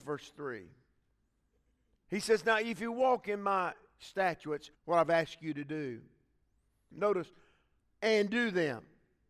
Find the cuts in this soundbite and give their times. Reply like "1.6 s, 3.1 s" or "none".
4.7 s, 6.9 s